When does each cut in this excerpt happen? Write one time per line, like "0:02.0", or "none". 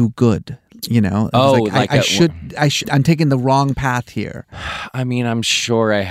0:02.8